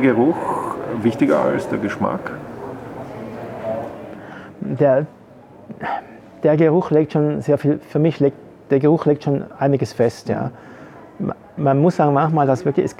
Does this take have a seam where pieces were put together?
no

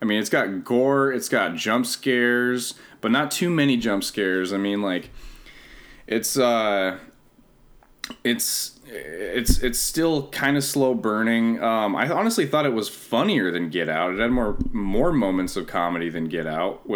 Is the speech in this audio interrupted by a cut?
no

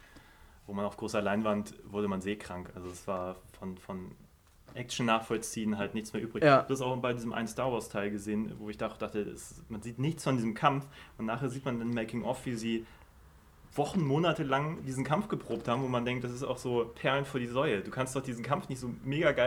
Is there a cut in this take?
no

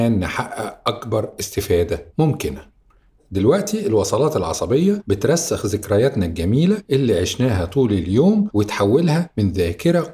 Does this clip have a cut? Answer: no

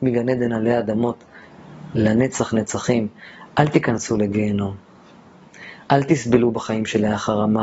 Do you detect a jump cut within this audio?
yes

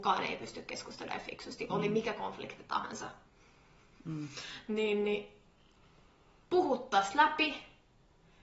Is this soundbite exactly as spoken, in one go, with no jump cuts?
yes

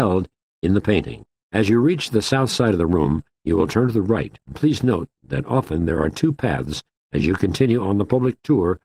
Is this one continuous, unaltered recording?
no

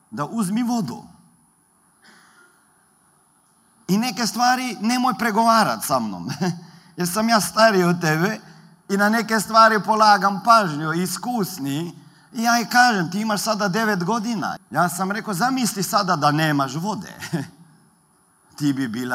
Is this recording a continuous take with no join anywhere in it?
no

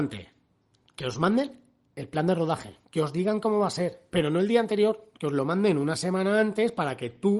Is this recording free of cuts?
yes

